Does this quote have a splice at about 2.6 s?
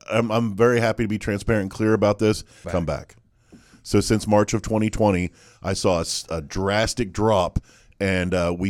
yes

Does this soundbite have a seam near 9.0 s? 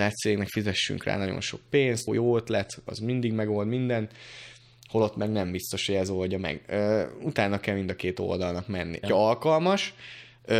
yes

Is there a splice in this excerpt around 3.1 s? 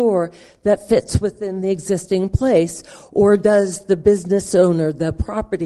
no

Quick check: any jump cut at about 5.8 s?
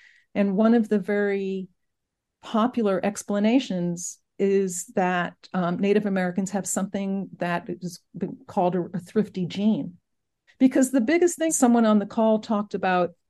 no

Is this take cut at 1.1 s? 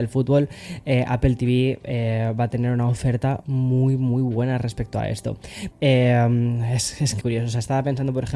no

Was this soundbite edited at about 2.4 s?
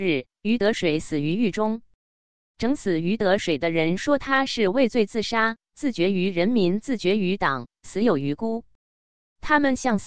no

